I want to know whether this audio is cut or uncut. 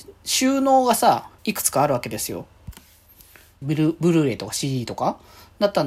cut